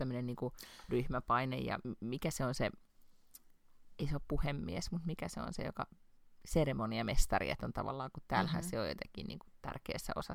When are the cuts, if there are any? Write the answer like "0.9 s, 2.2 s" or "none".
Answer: none